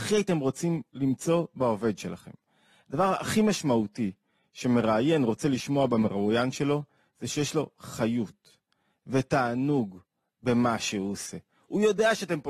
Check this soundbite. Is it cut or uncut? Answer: uncut